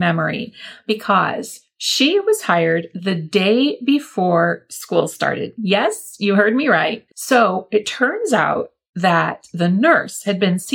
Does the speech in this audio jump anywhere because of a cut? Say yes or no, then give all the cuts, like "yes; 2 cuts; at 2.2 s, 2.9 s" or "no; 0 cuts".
yes; 1 cut; at 7.1 s